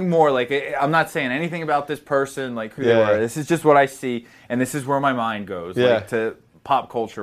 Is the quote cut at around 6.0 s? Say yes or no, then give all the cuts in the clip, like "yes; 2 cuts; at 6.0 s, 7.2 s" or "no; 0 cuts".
no; 0 cuts